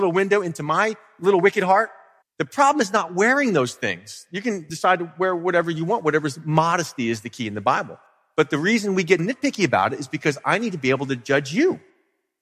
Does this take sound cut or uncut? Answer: cut